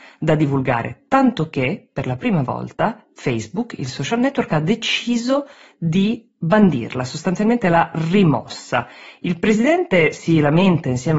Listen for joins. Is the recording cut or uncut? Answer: uncut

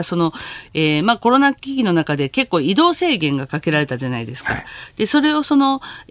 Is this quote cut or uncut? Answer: uncut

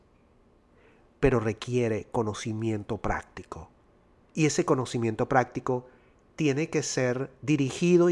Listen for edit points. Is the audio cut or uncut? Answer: uncut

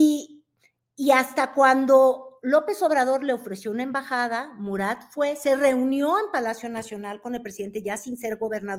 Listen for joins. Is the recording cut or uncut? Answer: uncut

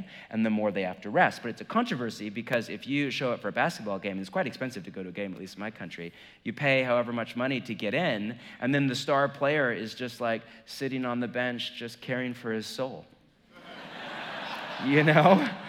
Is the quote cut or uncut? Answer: uncut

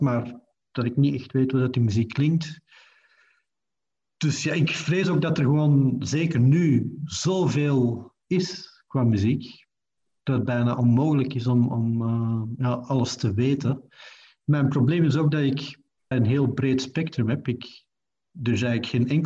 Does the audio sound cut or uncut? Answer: cut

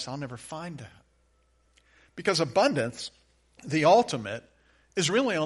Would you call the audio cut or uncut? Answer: uncut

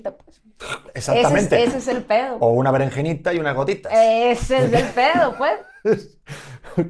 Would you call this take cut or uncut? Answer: uncut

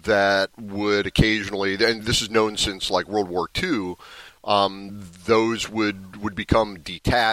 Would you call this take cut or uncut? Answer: uncut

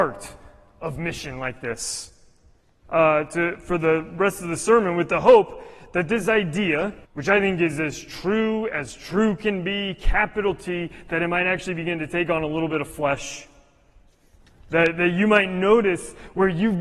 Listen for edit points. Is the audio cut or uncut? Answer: cut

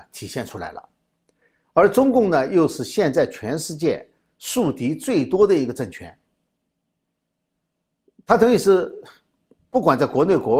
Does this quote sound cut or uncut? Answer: uncut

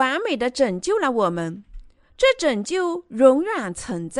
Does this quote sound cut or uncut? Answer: cut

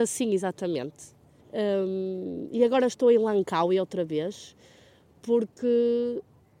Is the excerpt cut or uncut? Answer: cut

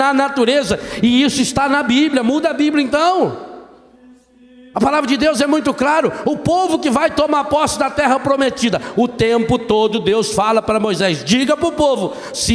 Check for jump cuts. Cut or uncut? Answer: uncut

